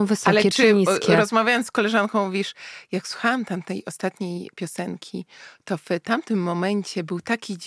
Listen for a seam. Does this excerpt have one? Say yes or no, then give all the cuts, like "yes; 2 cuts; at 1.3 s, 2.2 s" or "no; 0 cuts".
no; 0 cuts